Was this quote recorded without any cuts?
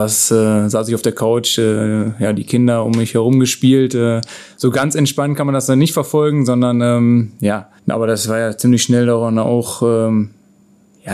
no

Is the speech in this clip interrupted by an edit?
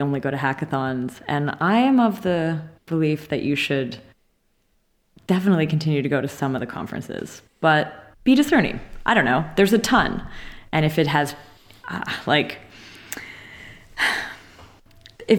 no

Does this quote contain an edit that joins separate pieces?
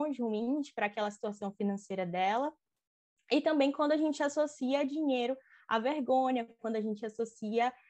no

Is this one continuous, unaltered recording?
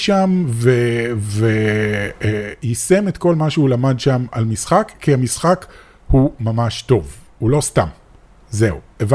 yes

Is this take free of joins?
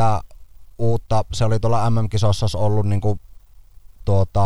yes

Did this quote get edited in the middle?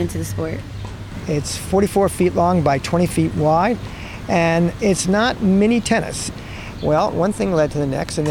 yes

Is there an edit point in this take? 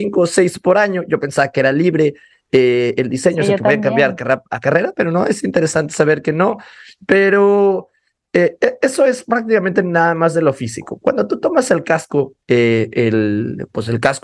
no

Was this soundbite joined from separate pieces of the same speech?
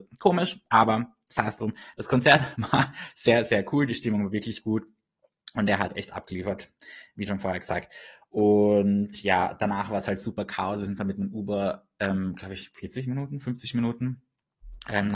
no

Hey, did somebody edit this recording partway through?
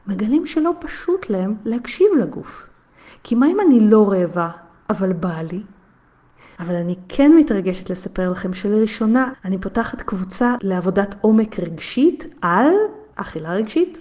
yes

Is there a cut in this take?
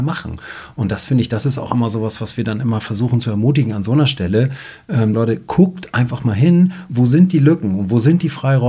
yes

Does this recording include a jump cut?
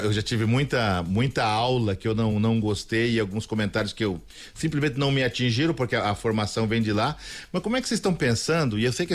no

